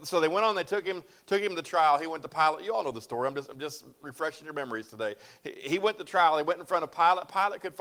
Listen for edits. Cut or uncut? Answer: uncut